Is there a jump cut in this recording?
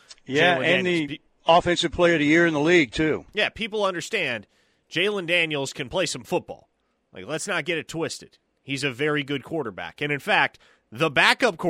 no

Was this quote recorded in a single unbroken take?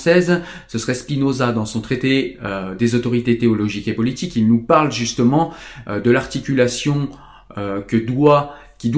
yes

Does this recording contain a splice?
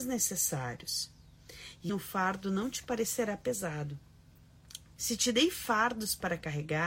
yes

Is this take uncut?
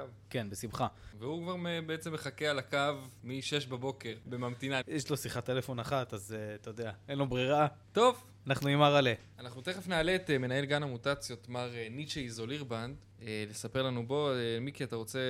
no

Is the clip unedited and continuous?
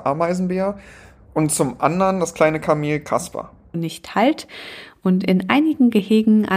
no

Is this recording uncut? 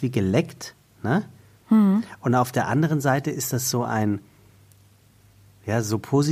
yes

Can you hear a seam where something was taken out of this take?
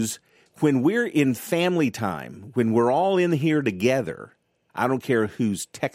yes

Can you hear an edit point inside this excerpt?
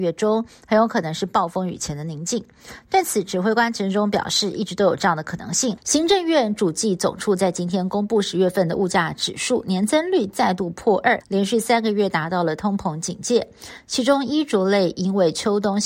yes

